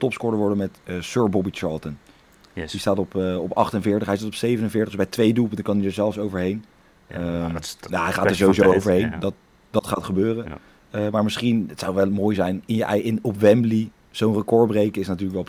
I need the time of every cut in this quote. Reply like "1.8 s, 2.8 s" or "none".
none